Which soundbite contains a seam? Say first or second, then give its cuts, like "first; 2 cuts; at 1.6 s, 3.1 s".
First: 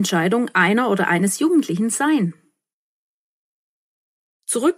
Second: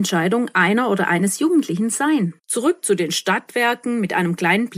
second; 1 cut; at 2.4 s